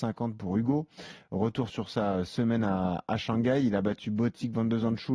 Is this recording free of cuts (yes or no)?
yes